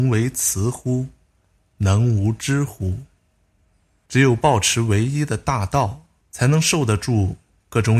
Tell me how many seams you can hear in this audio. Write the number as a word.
two